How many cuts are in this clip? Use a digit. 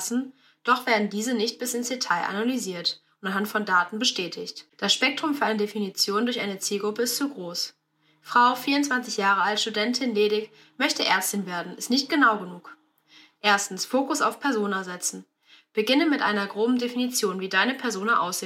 1